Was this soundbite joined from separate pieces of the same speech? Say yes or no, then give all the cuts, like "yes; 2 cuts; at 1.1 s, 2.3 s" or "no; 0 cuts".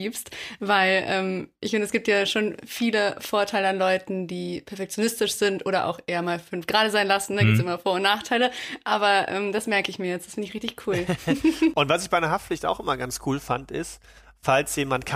no; 0 cuts